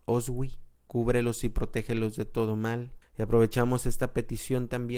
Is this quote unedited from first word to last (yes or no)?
no